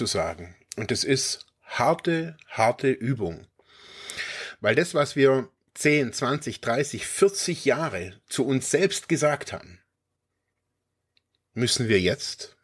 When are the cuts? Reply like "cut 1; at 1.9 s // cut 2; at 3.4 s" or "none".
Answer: none